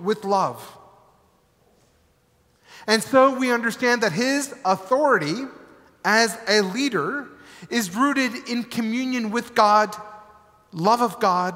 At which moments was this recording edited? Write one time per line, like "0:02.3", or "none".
none